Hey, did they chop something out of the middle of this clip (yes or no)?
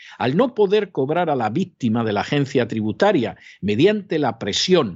no